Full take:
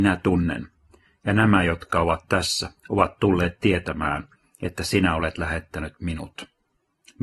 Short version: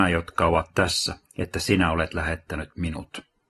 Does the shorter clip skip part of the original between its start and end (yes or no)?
yes